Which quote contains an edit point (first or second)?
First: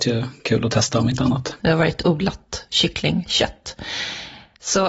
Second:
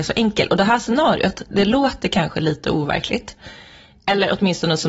first